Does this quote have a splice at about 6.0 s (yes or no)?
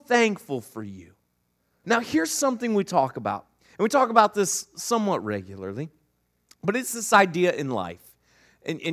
no